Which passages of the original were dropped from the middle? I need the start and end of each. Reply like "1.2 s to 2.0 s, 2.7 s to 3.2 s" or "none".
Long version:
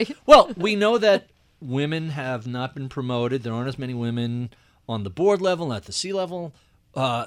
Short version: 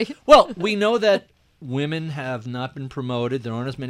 none